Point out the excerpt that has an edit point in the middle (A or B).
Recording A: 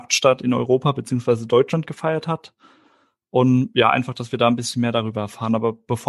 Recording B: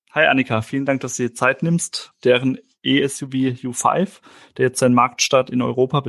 B